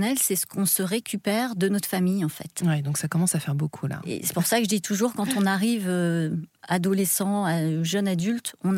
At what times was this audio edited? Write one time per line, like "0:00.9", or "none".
none